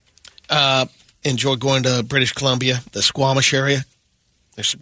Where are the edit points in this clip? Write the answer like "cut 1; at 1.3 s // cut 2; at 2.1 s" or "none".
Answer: cut 1; at 1.2 s